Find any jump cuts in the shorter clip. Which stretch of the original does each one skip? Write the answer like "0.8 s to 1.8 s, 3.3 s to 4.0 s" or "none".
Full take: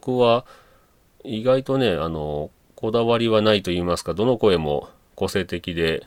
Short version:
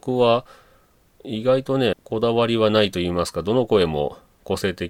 1.9 s to 2.6 s